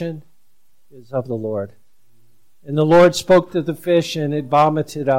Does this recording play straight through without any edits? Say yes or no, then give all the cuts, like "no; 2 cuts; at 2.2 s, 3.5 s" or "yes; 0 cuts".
yes; 0 cuts